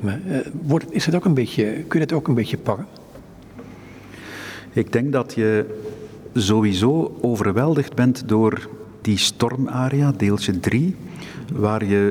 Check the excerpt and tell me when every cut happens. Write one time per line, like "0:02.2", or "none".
0:09.0